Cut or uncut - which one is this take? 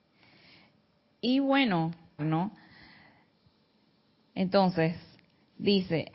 cut